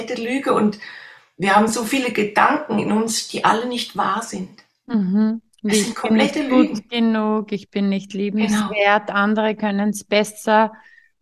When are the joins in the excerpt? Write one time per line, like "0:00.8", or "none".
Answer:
none